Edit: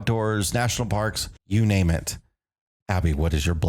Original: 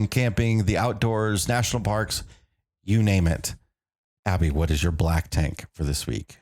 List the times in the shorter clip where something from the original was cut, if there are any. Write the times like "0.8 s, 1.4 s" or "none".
1.4 s